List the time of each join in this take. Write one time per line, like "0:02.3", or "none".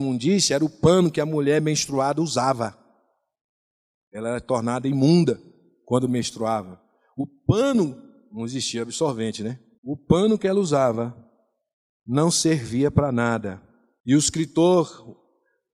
none

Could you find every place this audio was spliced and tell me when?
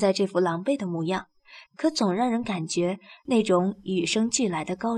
0:01.7

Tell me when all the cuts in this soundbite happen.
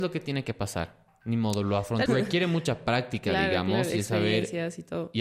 0:02.1

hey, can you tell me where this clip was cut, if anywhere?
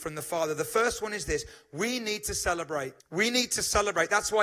0:03.0

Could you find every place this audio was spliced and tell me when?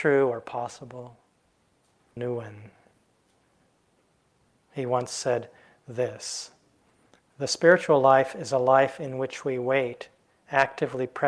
0:02.2

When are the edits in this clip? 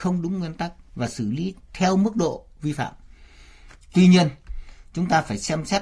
none

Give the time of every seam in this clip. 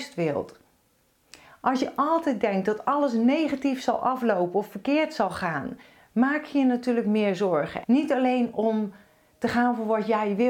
0:07.8

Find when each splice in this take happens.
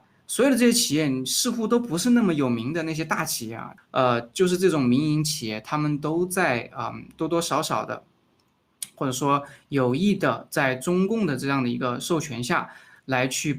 0:03.8

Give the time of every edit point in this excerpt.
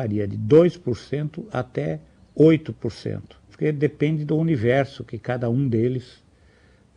0:03.5

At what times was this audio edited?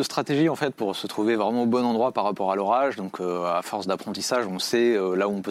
none

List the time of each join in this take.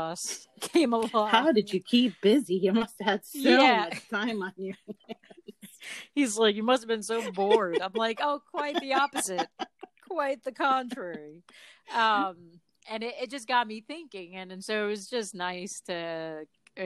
none

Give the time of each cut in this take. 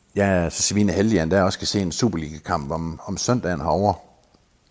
none

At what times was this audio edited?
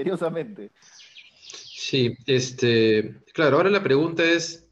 0:01.3
0:03.2

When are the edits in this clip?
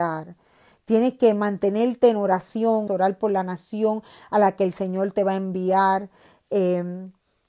0:02.9

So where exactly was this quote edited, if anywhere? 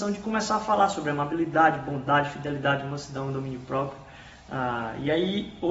none

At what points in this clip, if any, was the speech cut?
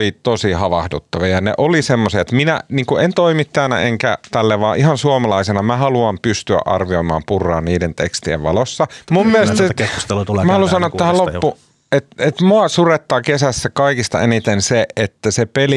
0:09.1

